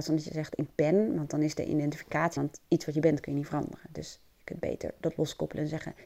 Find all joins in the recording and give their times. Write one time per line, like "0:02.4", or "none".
0:02.4